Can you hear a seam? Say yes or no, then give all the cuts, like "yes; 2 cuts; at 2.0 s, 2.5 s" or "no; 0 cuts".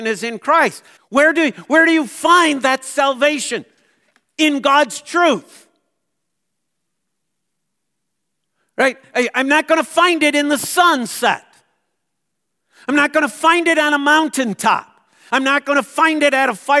yes; 2 cuts; at 1.0 s, 15.3 s